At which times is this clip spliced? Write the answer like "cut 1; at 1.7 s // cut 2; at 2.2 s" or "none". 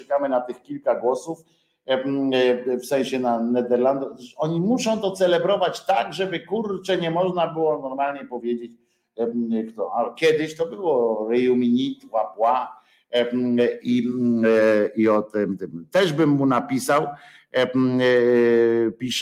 none